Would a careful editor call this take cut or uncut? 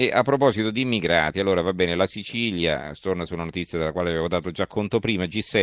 uncut